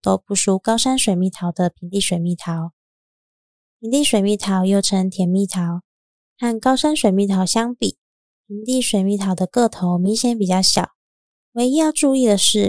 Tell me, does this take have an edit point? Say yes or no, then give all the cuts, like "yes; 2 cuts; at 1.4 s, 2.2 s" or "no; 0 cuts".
yes; 2 cuts; at 3.6 s, 11.3 s